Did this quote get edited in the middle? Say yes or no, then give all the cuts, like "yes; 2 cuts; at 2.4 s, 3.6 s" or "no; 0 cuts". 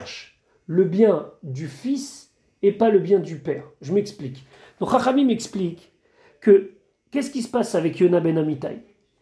no; 0 cuts